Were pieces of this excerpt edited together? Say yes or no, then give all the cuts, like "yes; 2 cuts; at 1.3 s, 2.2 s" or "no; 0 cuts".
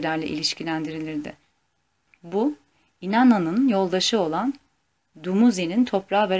no; 0 cuts